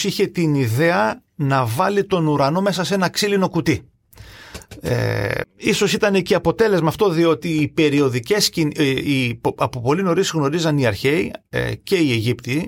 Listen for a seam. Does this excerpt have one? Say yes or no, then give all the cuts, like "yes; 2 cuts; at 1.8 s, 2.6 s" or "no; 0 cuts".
yes; 1 cut; at 5.4 s